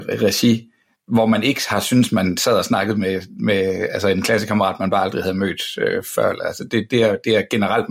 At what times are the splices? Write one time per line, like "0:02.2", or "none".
none